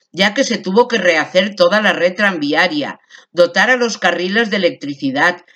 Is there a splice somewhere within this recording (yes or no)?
no